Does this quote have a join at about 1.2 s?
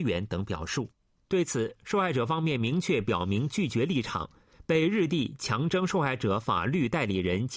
no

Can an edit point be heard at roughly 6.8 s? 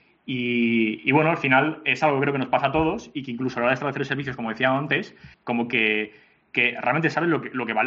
no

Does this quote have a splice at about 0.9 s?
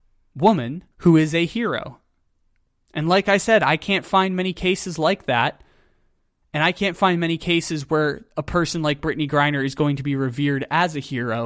yes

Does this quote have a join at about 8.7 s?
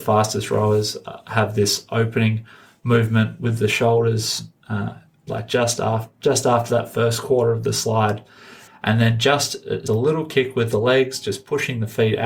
yes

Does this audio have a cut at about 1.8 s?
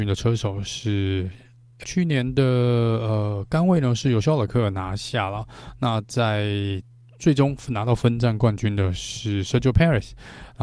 yes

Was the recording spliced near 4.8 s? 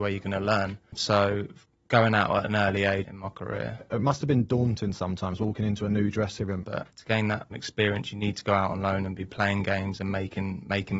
no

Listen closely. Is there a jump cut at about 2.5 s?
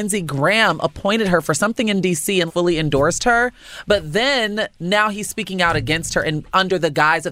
yes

